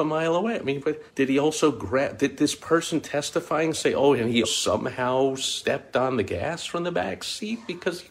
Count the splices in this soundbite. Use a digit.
2